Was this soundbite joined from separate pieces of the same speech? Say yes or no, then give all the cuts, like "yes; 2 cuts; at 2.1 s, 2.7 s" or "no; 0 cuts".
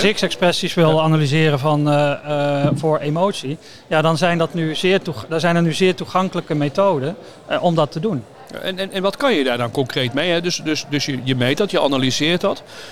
no; 0 cuts